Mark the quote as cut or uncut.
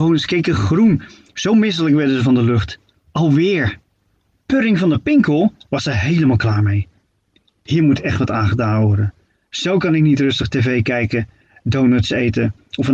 cut